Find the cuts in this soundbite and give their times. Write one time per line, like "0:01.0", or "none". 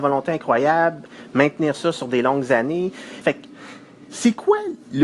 0:03.2